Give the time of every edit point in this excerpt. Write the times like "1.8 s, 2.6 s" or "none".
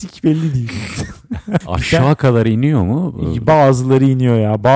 1.6 s